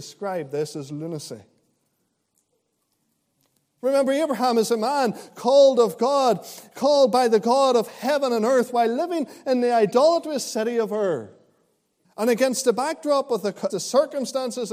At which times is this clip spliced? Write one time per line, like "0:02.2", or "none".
0:12.0
0:13.7